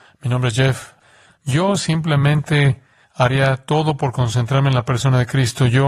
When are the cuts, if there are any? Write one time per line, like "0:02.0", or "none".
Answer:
0:01.3